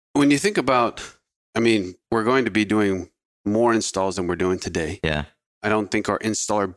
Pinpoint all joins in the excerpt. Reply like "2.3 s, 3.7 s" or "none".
2.0 s